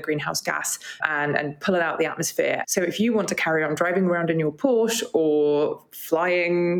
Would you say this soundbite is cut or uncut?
cut